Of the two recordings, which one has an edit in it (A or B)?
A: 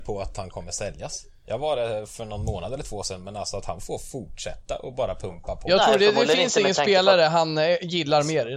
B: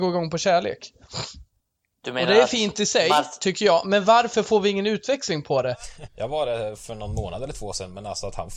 B